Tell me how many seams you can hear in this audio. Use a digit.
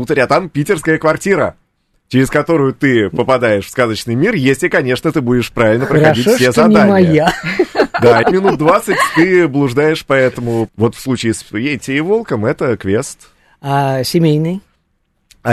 2